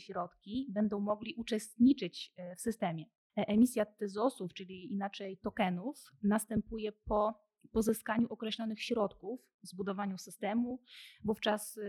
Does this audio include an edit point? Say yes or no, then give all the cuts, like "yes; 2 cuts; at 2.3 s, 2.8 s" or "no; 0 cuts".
yes; 1 cut; at 3.3 s